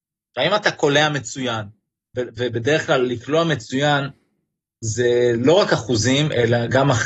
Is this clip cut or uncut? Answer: uncut